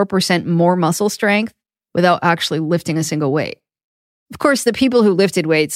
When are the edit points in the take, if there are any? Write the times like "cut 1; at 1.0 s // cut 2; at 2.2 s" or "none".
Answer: none